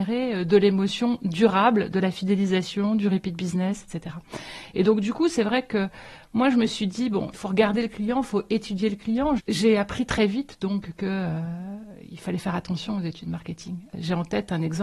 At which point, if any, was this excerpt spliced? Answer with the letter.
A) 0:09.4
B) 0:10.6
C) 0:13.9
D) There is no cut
A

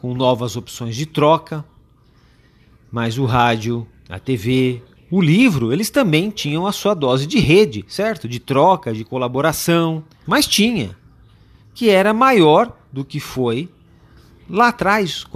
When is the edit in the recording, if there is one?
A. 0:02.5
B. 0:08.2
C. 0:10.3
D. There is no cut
C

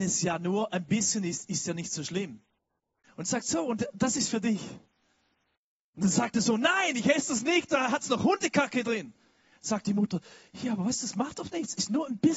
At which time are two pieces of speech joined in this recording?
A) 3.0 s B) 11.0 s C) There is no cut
A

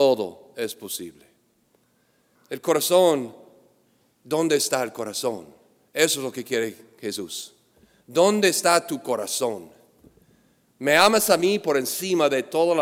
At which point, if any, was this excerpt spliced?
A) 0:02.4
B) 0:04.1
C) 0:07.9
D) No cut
A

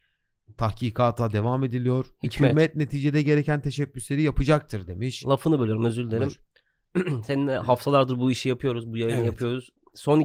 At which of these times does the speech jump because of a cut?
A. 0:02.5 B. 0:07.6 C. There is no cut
C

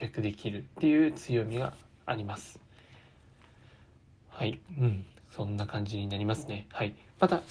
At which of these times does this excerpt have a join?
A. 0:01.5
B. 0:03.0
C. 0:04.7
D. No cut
D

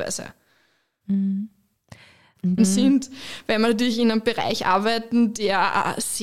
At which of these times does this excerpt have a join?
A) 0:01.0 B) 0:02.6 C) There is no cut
B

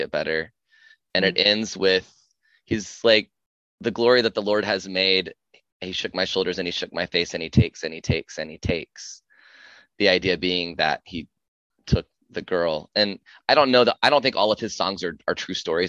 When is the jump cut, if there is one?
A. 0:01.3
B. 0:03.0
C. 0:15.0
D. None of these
D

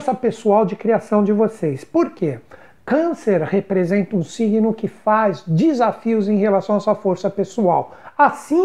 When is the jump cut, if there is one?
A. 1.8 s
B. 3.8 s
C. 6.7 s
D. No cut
D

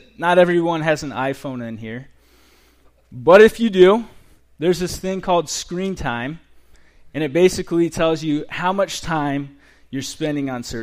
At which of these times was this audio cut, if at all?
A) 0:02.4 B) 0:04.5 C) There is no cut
C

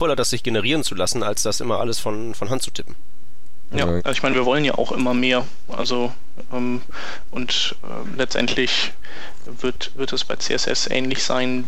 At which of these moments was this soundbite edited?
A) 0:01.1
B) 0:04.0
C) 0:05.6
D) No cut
B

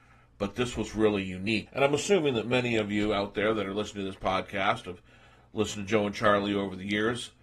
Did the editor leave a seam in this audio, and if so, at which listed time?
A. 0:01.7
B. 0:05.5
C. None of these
A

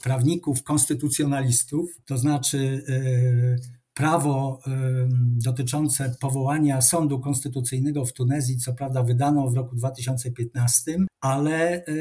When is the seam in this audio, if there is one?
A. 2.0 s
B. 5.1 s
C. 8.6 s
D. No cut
A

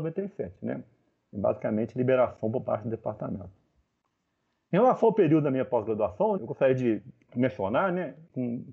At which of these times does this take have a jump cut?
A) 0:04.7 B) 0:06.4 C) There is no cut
B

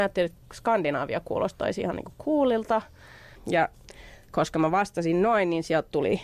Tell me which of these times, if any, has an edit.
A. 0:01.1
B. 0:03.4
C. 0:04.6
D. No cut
B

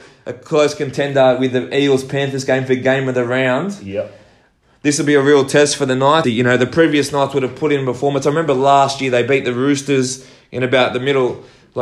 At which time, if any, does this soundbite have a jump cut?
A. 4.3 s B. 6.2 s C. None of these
B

